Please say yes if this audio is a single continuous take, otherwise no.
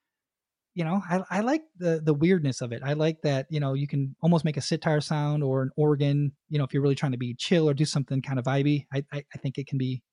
yes